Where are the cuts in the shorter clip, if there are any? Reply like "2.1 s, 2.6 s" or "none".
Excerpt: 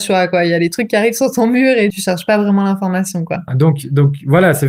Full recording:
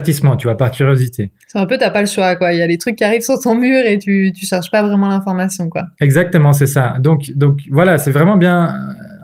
1.9 s, 3.5 s